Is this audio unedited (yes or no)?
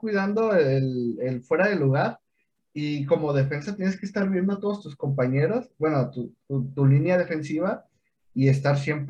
yes